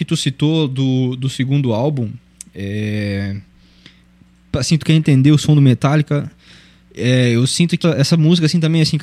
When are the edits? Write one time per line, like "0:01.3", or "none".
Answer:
0:04.8
0:07.8